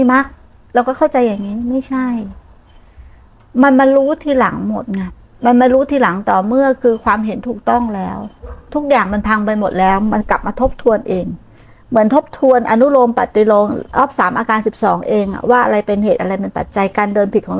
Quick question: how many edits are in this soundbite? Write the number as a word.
zero